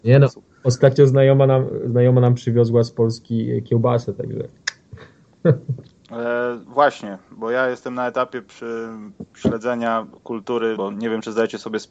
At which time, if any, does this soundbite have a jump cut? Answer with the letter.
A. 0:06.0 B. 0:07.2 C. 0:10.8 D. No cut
C